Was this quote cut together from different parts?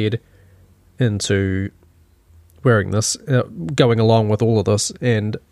no; 0 cuts

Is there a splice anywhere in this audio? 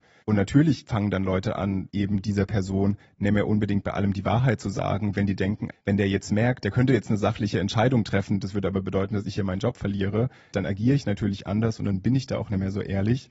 yes; 1 cut; at 5.7 s

